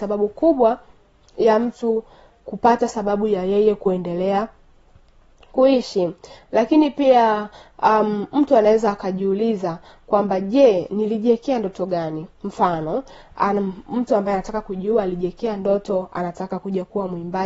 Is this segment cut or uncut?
uncut